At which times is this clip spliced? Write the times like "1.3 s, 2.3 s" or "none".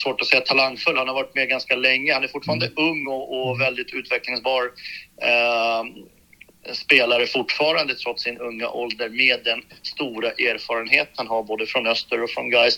none